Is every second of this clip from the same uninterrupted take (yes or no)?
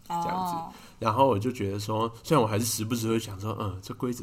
yes